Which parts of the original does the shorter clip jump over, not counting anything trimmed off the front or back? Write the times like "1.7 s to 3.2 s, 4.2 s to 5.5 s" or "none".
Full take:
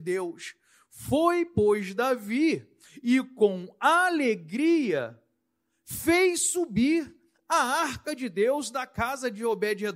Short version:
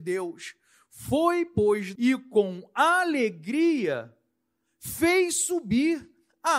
2.0 s to 3.0 s